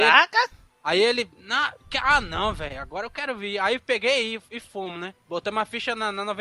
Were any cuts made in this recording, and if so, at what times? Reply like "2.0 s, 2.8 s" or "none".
none